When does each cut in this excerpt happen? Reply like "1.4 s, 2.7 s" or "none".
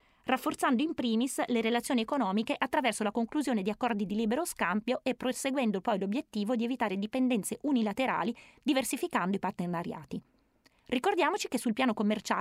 10.7 s